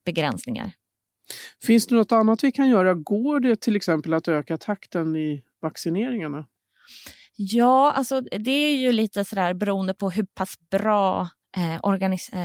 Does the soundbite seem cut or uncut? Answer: uncut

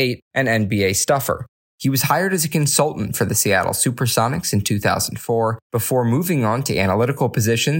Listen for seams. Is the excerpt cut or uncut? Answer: cut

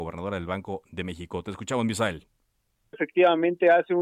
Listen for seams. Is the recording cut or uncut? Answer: cut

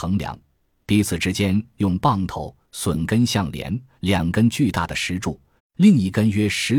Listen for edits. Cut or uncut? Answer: cut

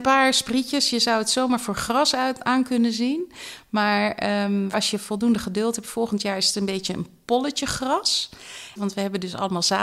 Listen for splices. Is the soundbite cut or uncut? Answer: cut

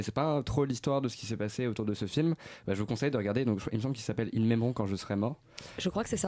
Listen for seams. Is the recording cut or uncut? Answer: uncut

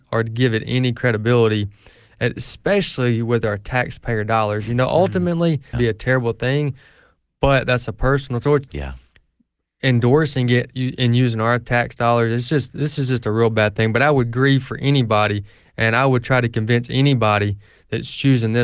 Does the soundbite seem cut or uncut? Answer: cut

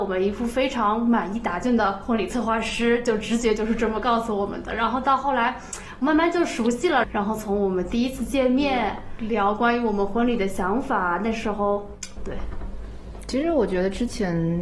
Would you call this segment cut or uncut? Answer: cut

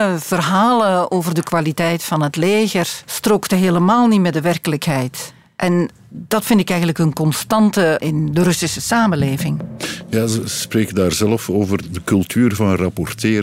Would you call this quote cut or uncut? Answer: uncut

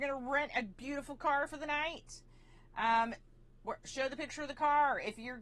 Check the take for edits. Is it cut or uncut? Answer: uncut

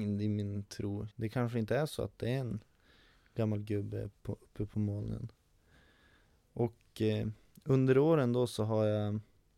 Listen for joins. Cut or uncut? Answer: cut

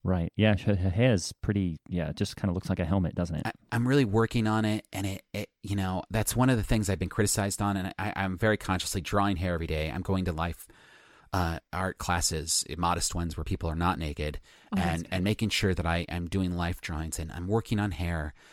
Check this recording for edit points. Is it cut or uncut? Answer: uncut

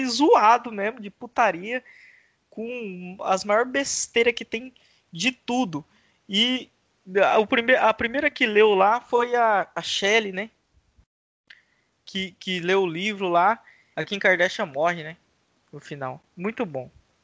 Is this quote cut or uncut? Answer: cut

